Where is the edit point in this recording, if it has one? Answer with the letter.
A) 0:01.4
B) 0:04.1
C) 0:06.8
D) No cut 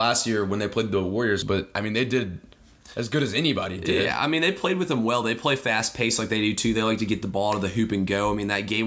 A